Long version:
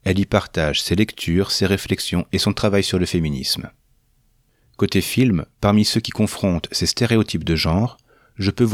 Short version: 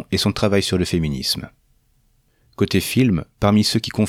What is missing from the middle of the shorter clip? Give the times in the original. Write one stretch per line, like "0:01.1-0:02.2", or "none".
none